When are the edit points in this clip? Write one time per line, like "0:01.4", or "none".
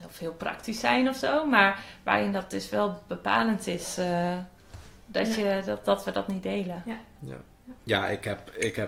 0:07.8